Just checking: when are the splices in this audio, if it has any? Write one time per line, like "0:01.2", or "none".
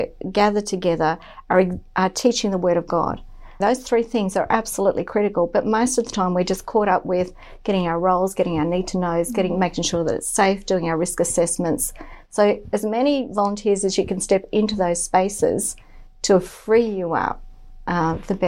0:03.6